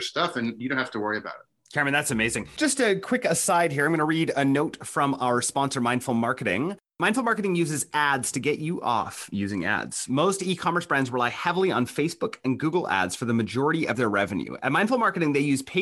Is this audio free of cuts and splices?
yes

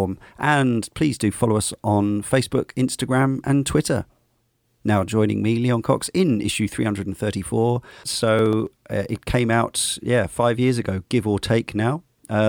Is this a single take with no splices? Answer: no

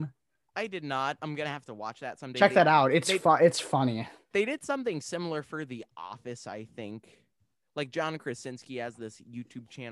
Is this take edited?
no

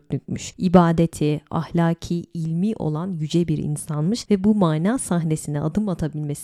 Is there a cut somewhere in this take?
yes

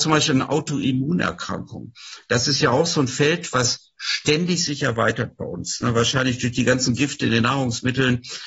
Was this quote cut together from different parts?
no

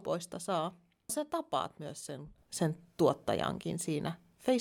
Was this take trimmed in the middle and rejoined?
yes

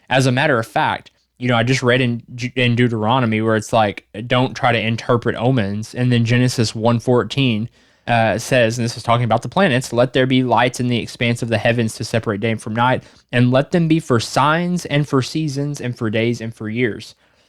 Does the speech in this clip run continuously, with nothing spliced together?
yes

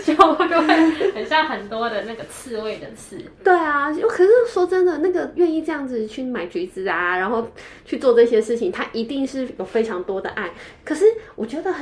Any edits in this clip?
no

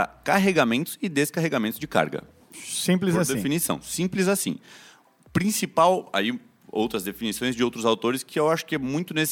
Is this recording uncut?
yes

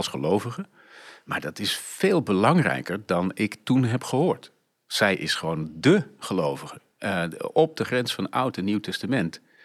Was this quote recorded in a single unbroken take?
yes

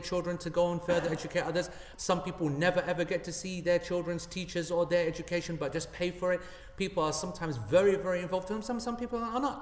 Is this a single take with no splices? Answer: no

